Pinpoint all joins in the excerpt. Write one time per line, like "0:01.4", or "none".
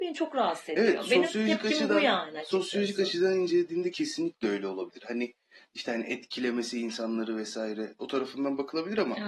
none